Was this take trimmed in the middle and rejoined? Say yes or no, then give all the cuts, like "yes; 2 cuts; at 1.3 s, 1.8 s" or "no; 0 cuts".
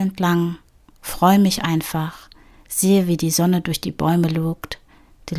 no; 0 cuts